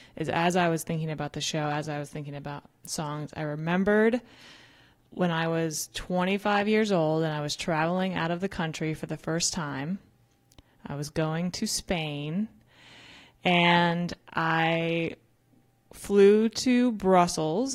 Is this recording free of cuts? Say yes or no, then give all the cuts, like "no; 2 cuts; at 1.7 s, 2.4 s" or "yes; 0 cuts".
yes; 0 cuts